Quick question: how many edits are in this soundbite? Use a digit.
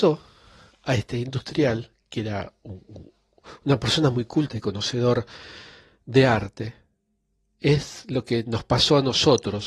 0